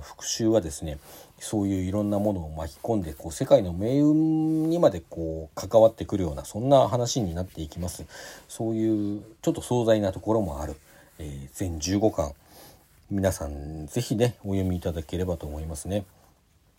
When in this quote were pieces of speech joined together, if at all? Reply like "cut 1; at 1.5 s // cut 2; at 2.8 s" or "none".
none